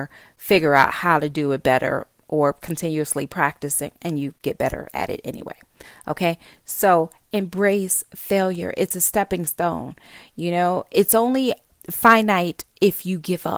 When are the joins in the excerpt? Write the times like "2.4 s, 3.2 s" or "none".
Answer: 2.6 s